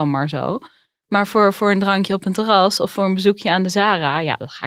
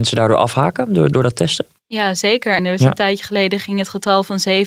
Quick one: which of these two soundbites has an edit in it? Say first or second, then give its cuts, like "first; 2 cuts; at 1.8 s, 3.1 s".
second; 2 cuts; at 1.1 s, 2.6 s